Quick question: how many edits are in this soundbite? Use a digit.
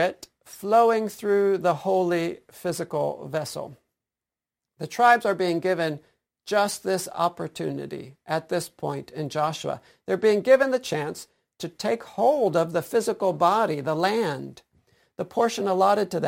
0